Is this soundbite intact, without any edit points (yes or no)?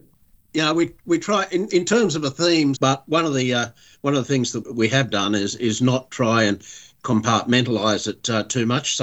no